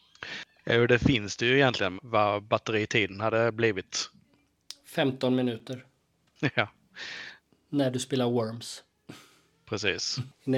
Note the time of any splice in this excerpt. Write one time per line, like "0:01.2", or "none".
0:02.0